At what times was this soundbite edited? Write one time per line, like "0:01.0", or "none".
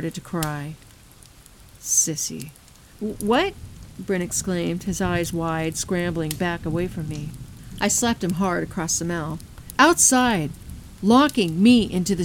0:02.9